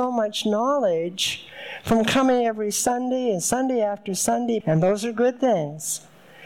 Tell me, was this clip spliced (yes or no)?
yes